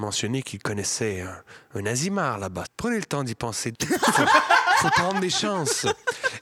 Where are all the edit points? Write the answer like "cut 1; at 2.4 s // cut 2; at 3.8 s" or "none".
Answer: cut 1; at 2.6 s // cut 2; at 3.7 s

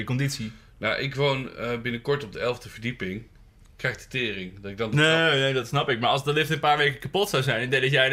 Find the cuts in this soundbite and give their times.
none

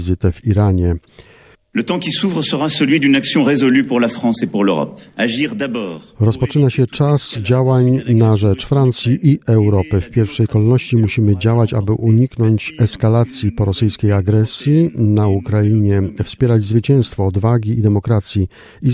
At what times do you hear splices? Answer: cut 1; at 1.5 s

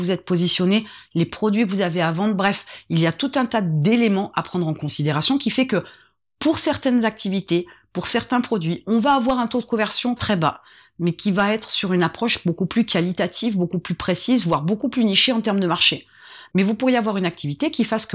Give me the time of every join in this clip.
cut 1; at 10.2 s

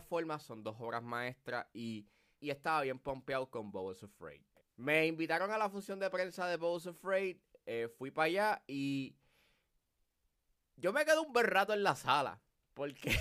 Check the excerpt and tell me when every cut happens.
none

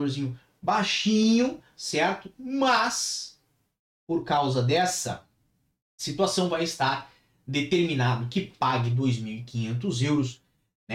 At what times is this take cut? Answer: none

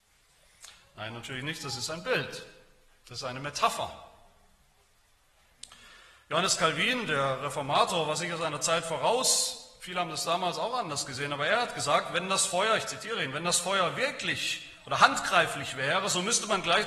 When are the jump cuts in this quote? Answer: none

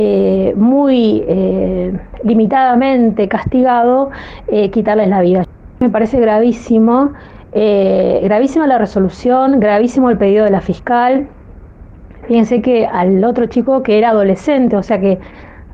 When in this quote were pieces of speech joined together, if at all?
none

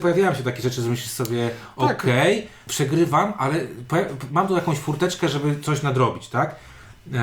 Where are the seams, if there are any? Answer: cut 1; at 2.7 s

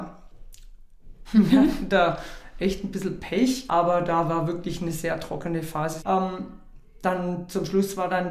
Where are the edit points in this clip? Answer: cut 1; at 1.2 s // cut 2; at 3.7 s // cut 3; at 6.0 s

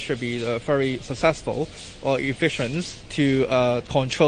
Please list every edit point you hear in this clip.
none

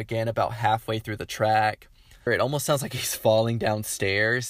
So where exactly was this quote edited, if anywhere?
cut 1; at 2.3 s

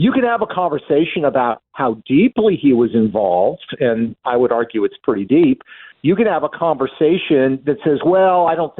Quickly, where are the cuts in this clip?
none

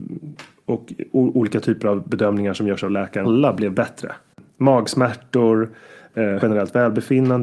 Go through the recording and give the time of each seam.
cut 1; at 3.2 s // cut 2; at 6.4 s

